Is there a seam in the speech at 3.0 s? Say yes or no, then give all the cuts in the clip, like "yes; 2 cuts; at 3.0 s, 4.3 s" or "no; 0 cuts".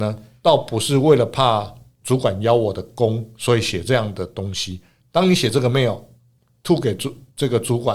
no; 1 cut; at 5.0 s